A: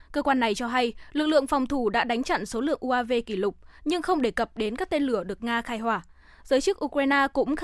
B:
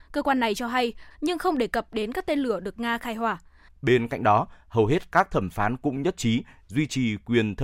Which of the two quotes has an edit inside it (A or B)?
B